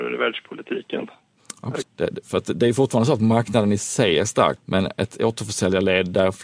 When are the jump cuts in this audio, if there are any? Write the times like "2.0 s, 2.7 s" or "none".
1.8 s, 4.6 s

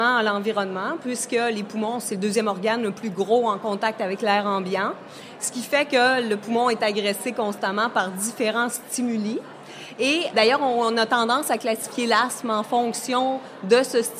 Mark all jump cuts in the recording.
10.3 s

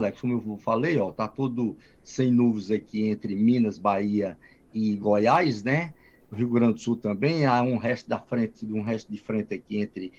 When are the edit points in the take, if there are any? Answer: none

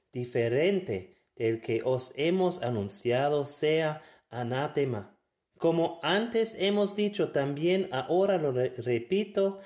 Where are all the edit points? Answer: 5.5 s

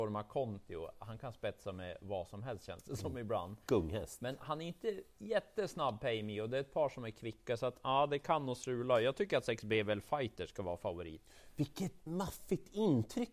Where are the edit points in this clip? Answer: 12.1 s

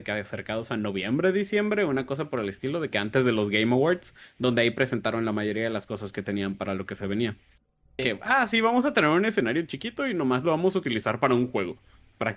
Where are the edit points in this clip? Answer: 8.0 s

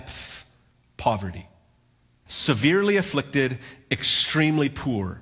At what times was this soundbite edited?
2.3 s

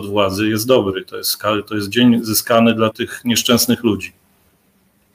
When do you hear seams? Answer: 2.9 s

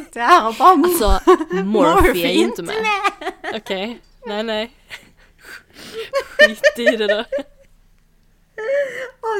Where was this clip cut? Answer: none

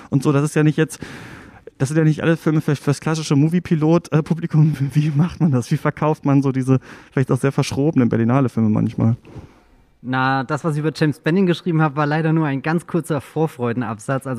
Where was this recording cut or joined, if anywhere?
none

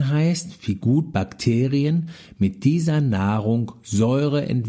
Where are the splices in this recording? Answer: none

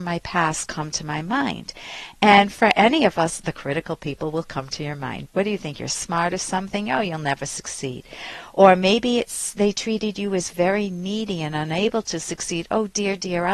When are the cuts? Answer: 5.2 s

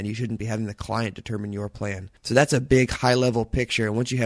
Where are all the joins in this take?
2.2 s

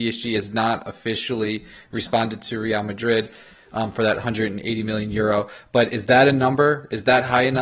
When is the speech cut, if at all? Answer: none

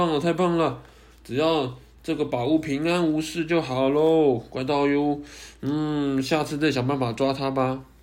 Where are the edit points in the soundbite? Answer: none

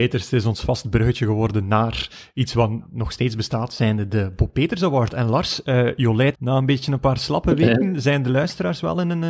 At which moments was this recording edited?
6.3 s

